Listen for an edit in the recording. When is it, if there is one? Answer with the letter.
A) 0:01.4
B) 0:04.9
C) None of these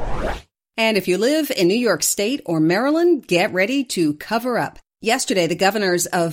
C